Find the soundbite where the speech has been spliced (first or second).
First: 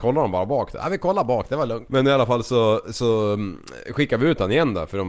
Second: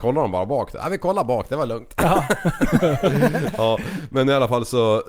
first